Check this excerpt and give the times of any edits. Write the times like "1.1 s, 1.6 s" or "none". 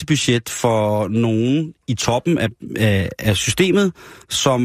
none